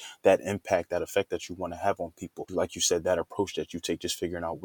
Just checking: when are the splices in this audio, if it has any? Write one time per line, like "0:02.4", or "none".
0:02.5